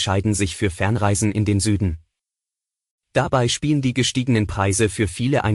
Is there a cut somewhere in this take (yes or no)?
no